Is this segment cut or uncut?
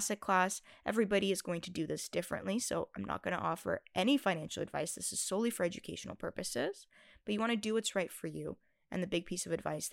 uncut